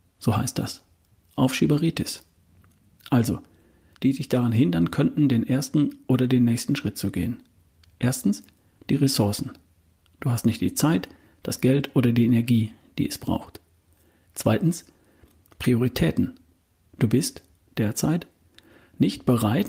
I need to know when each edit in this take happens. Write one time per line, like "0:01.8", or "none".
0:03.9